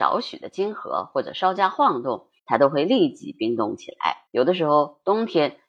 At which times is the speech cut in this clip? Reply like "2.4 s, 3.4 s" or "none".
2.4 s, 4.3 s